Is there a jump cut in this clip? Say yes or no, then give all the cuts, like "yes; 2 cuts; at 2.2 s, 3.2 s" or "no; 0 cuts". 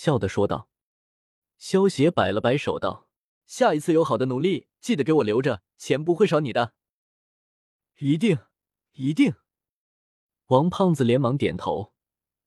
yes; 2 cuts; at 3.4 s, 5.7 s